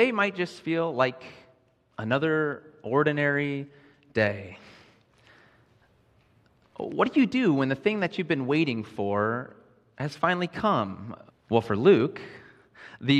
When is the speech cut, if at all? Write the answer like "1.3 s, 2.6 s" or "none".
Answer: 11.3 s